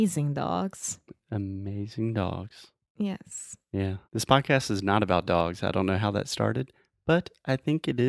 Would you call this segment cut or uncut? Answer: cut